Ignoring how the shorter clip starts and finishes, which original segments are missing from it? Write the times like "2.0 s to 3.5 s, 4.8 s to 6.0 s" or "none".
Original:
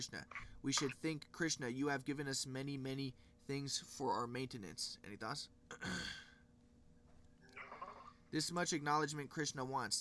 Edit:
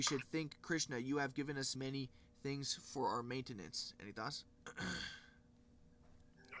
2.4 s to 2.8 s